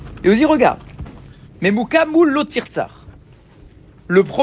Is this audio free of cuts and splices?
no; 1 cut; at 1.5 s

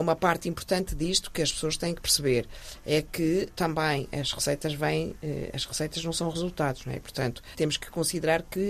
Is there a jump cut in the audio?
no; 0 cuts

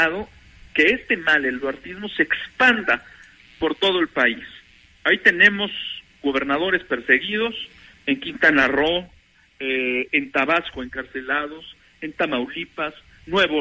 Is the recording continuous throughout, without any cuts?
yes; 0 cuts

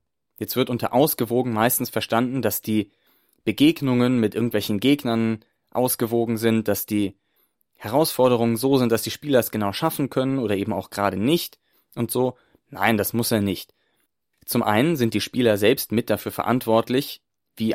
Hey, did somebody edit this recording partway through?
no; 0 cuts

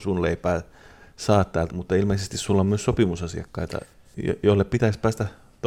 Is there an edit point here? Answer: yes; 1 cut; at 1.7 s

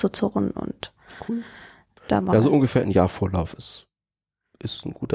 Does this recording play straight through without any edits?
yes; 0 cuts

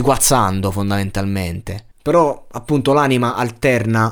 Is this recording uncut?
no; 1 cut; at 1.9 s

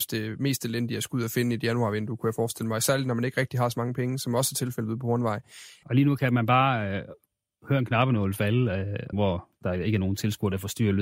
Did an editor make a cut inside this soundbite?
yes; 2 cuts; at 5.8 s, 9.1 s

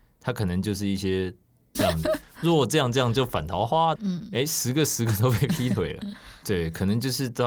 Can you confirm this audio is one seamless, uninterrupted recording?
no; 3 cuts; at 1.8 s, 4.0 s, 6.4 s

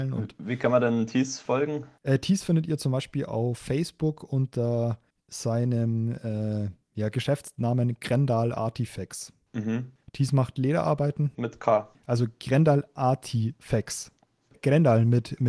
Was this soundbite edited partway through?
no; 0 cuts

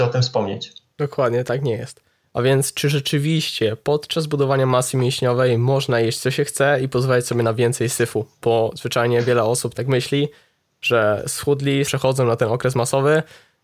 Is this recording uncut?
no; 2 cuts; at 2.2 s, 11.9 s

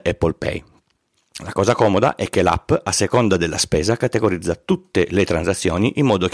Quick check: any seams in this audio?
no; 0 cuts

